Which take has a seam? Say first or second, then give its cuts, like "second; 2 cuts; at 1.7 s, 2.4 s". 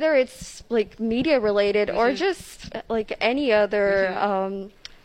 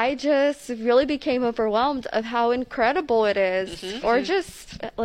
second; 1 cut; at 4.0 s